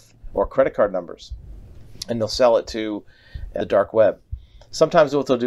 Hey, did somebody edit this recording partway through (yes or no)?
no